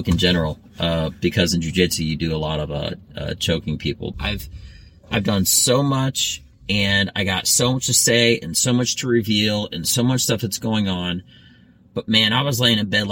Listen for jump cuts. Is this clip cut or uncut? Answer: cut